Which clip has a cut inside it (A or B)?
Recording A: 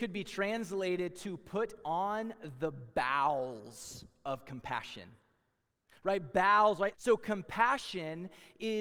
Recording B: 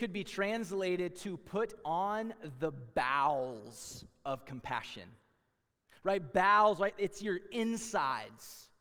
A